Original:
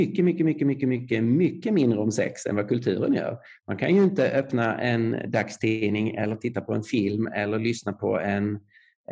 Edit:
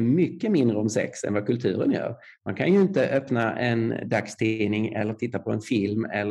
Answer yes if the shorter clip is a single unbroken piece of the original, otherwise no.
yes